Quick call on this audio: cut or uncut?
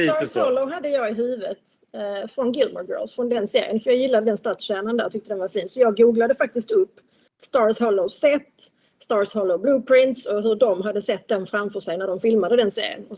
uncut